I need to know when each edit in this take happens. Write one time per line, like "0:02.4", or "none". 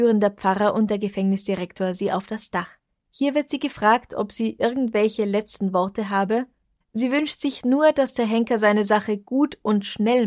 0:06.8